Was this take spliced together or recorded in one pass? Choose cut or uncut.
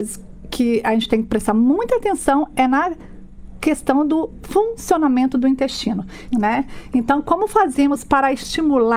cut